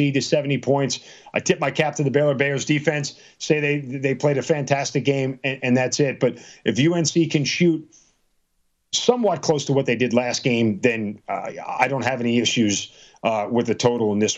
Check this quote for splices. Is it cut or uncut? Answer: uncut